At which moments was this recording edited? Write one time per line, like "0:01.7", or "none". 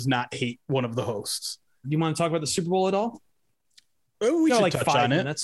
0:01.8